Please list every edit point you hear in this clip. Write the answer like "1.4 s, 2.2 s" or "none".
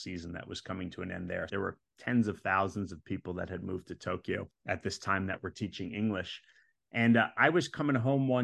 1.5 s